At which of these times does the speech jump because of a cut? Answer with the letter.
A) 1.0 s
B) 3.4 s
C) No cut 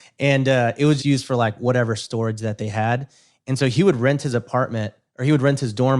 A